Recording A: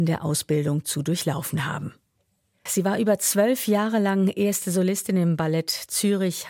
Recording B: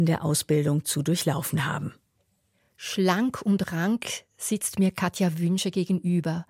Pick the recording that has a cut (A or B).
A